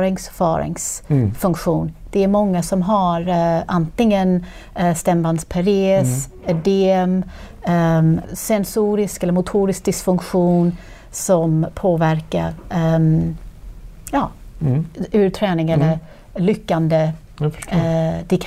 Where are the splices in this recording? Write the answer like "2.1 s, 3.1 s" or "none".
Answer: 8.2 s